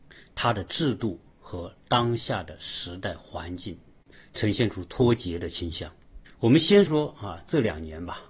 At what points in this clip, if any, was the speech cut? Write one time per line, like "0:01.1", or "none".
0:06.9

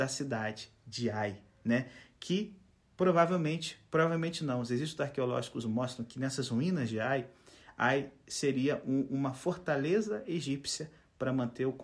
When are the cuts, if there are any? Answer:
none

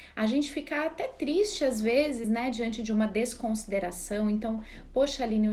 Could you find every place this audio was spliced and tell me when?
none

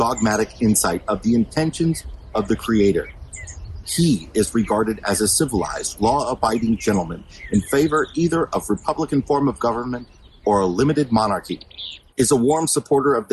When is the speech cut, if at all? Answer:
0:03.8
0:12.1

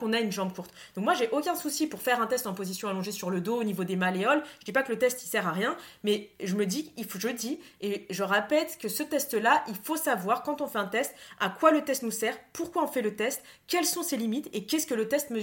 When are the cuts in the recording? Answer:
none

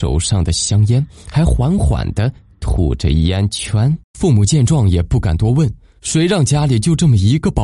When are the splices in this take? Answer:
0:04.0

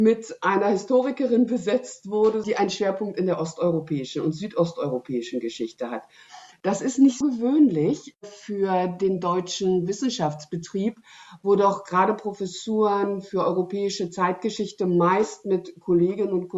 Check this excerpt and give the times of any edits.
0:02.4
0:07.2

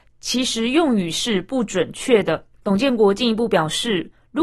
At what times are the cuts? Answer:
0:02.5

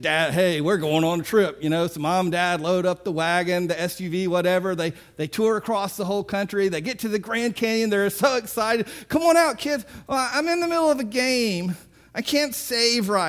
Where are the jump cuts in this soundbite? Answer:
none

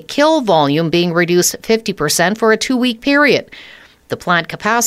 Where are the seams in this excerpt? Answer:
none

